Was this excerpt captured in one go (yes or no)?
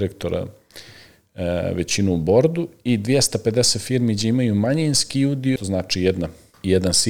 no